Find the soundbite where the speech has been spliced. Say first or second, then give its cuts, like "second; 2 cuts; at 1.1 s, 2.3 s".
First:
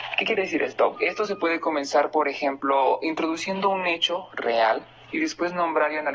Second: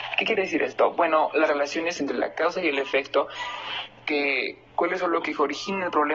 first; 1 cut; at 0.9 s